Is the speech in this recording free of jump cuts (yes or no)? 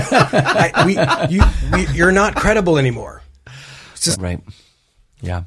no